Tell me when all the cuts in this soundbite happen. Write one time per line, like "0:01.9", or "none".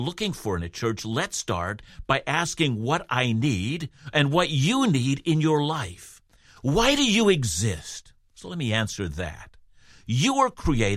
none